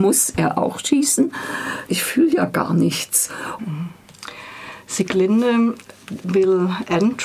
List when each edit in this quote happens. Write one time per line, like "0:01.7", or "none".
0:01.9
0:03.6

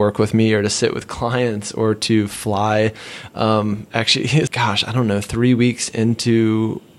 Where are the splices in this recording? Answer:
0:04.5

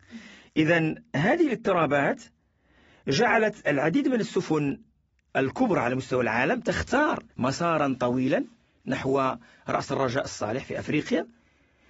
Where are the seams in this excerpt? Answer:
0:07.3

